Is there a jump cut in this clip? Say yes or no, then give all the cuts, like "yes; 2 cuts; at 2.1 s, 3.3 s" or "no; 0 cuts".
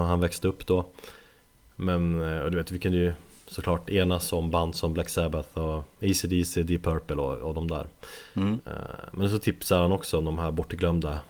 no; 0 cuts